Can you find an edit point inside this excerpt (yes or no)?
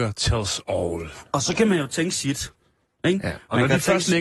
no